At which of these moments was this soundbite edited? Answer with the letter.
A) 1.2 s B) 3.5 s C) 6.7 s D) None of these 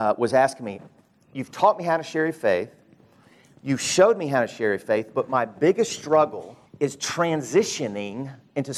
C